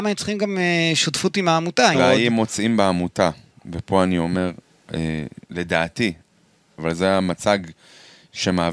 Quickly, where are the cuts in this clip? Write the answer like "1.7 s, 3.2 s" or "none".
1.9 s, 6.8 s

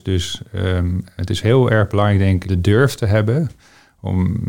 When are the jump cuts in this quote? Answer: 1.2 s, 2.4 s

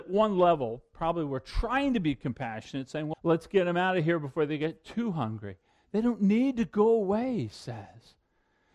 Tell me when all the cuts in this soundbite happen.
3.1 s

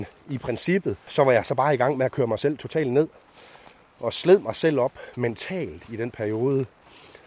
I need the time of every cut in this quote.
1.1 s

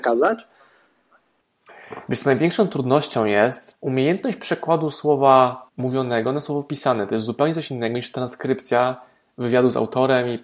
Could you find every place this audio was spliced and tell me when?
3.7 s, 5.7 s

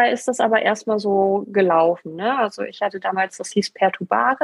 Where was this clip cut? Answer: none

